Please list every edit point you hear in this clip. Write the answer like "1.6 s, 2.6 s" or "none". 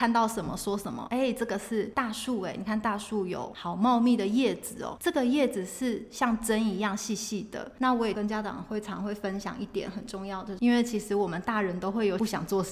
7.8 s, 10.6 s